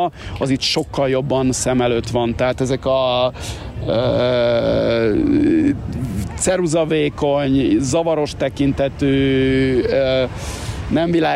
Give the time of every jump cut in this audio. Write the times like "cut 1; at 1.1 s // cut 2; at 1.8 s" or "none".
none